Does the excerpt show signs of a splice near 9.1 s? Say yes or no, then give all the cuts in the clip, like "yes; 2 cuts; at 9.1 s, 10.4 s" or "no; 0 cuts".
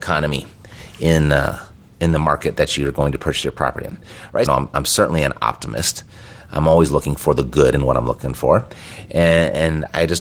no; 1 cut; at 4.5 s